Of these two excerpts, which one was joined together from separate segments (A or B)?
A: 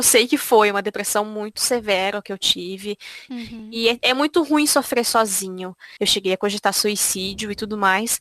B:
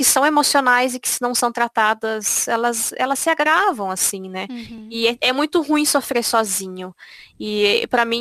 A